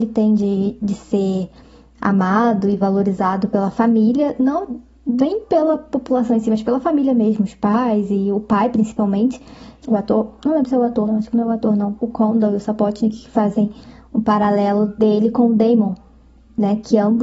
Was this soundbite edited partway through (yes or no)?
yes